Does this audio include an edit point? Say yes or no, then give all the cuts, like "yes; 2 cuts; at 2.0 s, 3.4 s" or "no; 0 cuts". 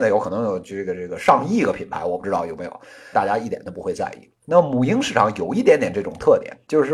yes; 1 cut; at 3.1 s